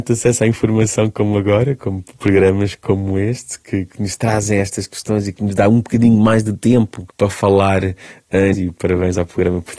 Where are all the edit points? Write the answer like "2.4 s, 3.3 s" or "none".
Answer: 7.1 s, 8.5 s